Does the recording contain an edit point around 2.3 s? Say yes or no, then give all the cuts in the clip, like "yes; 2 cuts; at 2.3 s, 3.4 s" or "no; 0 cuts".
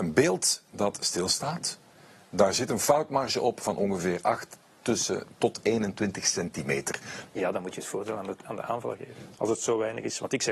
no; 2 cuts; at 7.3 s, 9.3 s